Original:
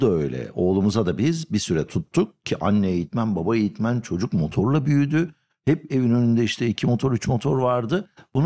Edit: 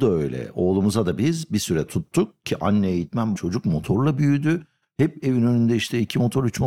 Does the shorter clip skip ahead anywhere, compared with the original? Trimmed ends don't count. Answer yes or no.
yes